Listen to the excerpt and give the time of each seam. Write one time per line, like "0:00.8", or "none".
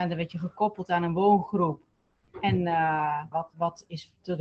0:03.3